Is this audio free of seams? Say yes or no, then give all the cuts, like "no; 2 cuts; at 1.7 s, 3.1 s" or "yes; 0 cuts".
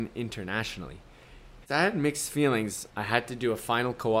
no; 2 cuts; at 1.6 s, 2.9 s